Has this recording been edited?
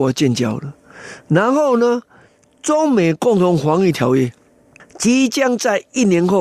no; 0 cuts

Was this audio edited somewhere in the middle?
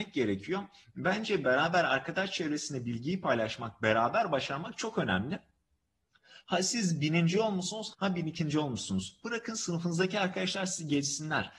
yes; 1 cut; at 7.9 s

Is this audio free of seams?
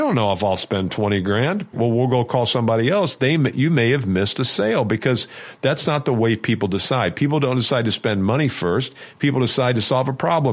no; 1 cut; at 1.7 s

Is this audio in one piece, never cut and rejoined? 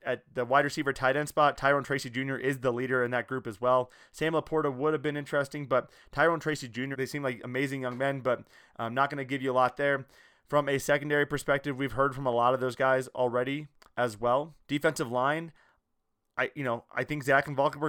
no; 2 cuts; at 6.9 s, 14.6 s

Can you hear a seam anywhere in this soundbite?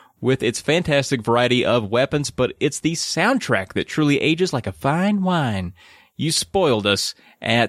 no; 0 cuts

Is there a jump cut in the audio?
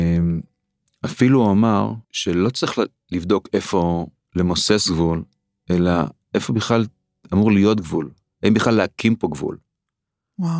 yes; 1 cut; at 2.0 s

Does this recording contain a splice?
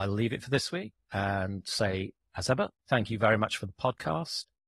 no; 0 cuts

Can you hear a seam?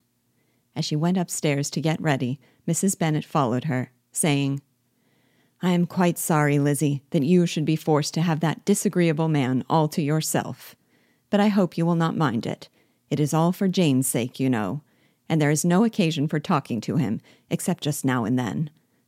no; 0 cuts

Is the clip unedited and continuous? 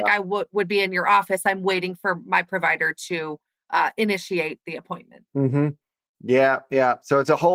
yes; 0 cuts

